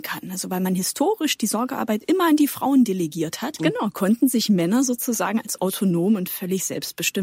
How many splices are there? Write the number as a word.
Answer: one